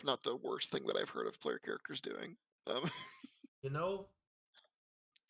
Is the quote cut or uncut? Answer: cut